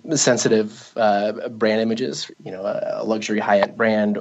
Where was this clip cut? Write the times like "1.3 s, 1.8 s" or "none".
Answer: 2.3 s

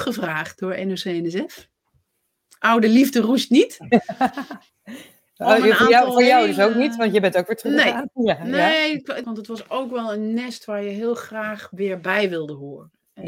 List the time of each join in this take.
9.2 s

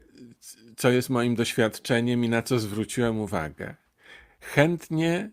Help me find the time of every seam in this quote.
none

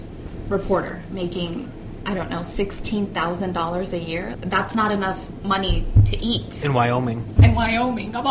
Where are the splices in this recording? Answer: 4.3 s, 7.4 s

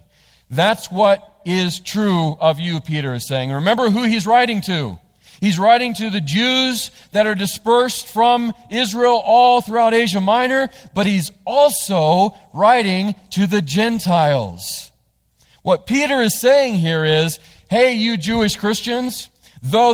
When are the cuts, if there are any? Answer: none

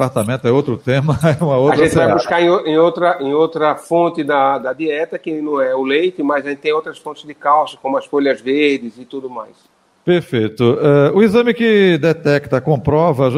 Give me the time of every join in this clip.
none

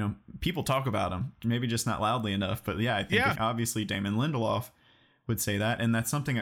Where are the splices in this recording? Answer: 3.4 s

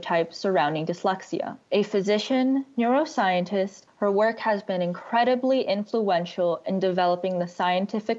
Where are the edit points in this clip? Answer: 1.6 s, 3.9 s

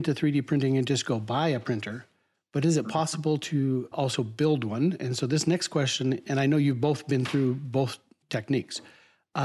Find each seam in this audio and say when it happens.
3.9 s

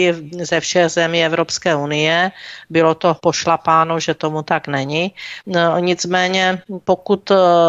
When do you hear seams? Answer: none

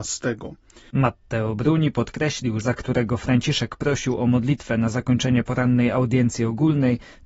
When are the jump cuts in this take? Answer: 0.9 s, 2.6 s

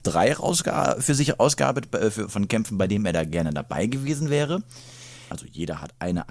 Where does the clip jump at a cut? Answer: 5.3 s

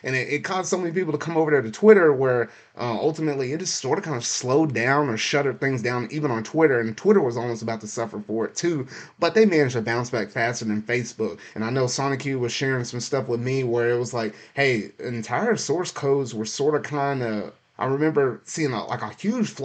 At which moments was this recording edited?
11.5 s, 17.7 s

